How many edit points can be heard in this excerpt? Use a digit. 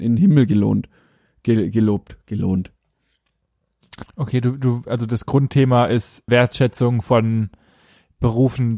2